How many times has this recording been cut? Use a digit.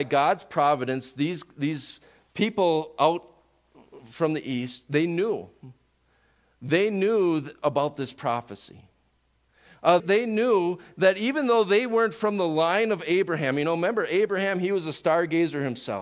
1